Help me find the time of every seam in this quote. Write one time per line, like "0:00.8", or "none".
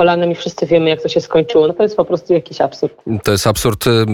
0:01.7